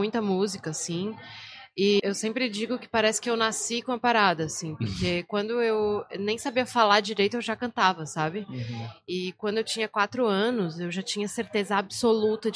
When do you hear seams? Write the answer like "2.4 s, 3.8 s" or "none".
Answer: 2.0 s